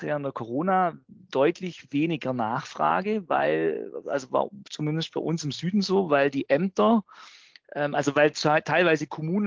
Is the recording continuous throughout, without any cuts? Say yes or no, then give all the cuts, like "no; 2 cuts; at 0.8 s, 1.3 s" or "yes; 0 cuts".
yes; 0 cuts